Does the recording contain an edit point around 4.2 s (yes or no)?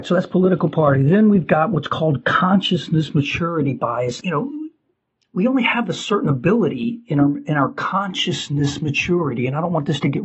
yes